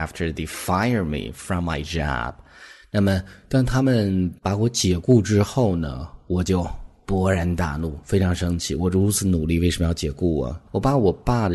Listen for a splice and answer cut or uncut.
cut